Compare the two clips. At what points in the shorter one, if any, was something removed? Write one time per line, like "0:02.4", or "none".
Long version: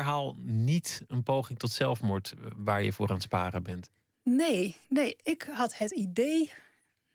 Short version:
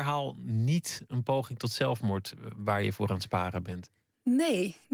none